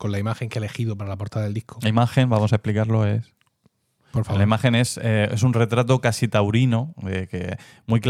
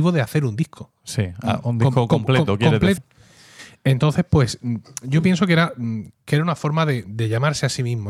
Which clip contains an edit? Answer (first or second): second